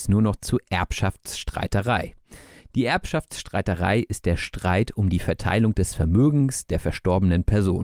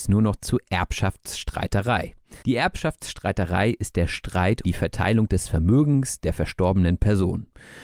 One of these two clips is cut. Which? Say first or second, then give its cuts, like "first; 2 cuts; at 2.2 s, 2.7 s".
second; 2 cuts; at 2.4 s, 4.6 s